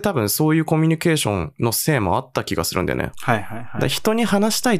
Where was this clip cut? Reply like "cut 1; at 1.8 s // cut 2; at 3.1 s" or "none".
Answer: cut 1; at 3.1 s